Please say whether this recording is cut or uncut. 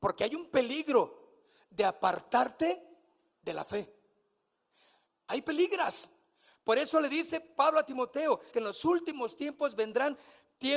cut